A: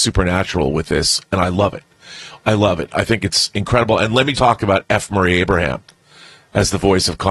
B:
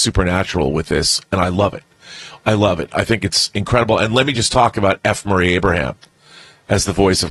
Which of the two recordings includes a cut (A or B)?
A